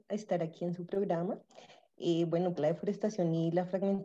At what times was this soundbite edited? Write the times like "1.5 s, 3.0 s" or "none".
2.6 s